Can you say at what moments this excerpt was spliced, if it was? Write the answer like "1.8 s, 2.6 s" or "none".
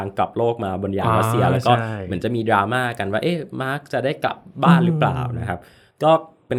none